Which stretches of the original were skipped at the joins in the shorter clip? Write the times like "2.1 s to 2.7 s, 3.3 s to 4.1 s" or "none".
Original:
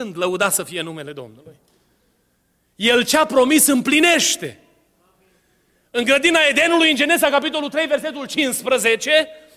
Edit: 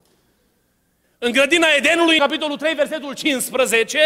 2.7 s to 5.8 s, 6.9 s to 7.3 s